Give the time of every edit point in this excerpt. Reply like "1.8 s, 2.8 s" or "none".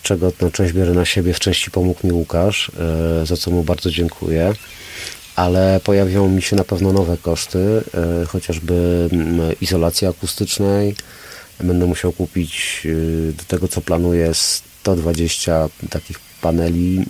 none